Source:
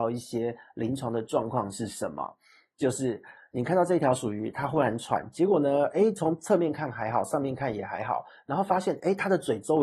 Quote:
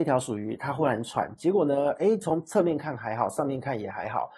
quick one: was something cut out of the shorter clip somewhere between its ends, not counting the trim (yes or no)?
no